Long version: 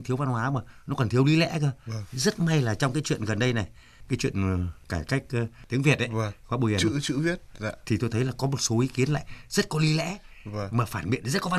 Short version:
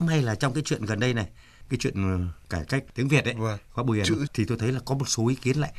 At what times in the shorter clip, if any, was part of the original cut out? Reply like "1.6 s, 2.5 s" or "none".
2.9 s, 4.3 s